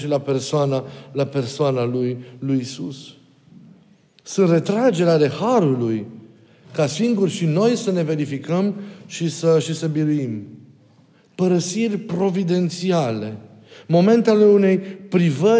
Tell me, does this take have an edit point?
yes; 1 cut; at 6.6 s

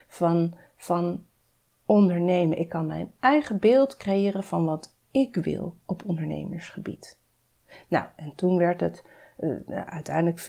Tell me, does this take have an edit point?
no; 0 cuts

